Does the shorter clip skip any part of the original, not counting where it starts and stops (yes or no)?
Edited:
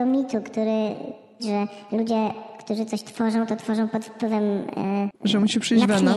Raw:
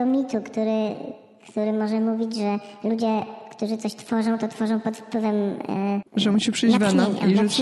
yes